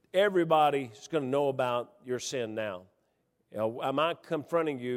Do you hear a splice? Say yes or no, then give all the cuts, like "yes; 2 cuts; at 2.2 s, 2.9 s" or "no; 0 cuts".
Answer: no; 0 cuts